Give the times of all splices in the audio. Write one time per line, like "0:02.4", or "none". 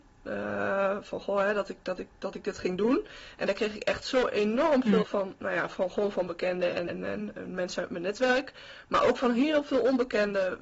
0:05.0
0:06.9